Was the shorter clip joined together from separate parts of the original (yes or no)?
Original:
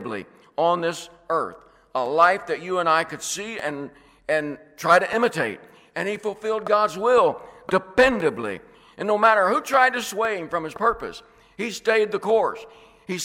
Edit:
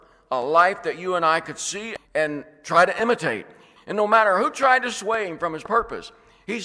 yes